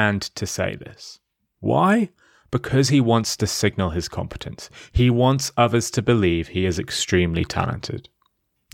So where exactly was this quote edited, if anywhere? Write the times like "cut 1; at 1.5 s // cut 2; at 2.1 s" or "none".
none